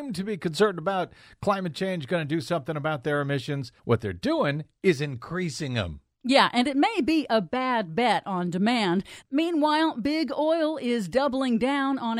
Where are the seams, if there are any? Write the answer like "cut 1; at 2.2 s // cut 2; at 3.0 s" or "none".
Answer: cut 1; at 3.8 s // cut 2; at 9.2 s